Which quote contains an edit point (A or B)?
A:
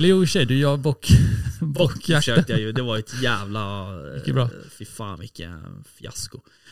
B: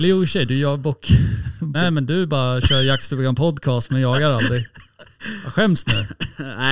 B